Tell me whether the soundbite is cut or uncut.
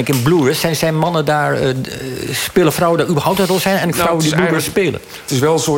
uncut